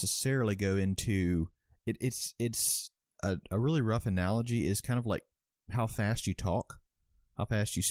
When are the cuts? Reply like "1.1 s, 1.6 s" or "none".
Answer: none

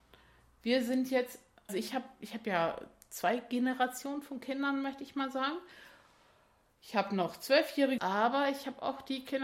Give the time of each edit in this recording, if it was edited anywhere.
1.7 s, 8.0 s

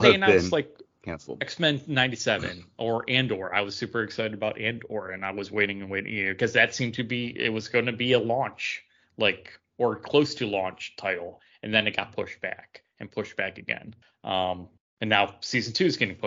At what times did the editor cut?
none

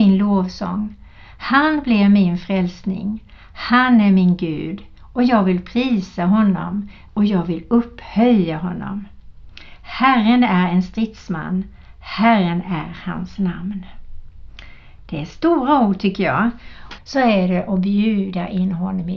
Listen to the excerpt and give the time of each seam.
7.1 s, 17.0 s

